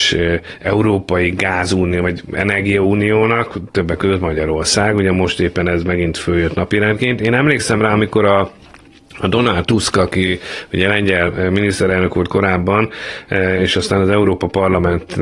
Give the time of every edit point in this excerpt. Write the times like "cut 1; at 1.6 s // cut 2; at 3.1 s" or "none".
none